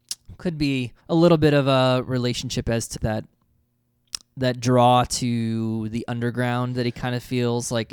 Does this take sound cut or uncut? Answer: cut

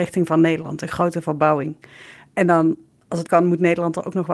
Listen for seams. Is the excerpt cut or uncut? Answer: cut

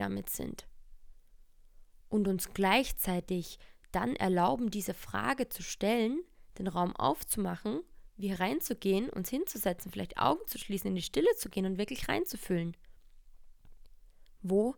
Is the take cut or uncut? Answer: uncut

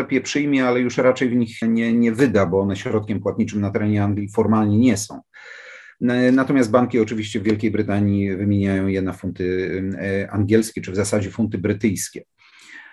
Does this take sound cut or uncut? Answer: cut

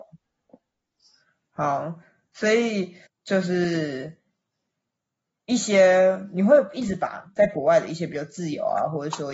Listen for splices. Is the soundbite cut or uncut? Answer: cut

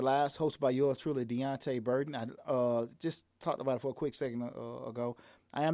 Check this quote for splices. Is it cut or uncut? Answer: uncut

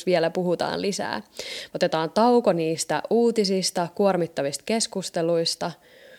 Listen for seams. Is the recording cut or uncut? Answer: cut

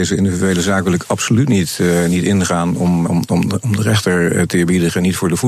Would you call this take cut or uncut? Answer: cut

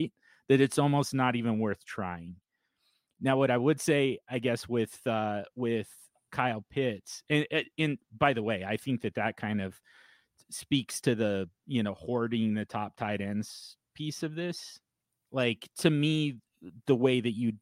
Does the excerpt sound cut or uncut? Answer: uncut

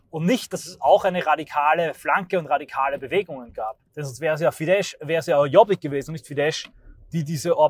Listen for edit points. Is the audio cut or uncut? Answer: cut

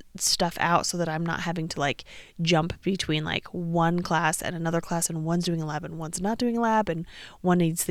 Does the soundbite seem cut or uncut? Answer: uncut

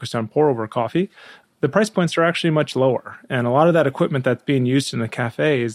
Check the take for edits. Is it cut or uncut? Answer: uncut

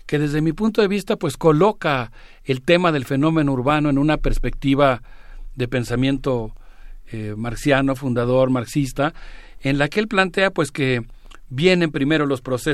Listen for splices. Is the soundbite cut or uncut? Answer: uncut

